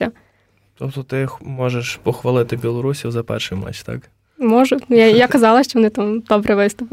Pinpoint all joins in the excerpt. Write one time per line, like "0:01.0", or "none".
none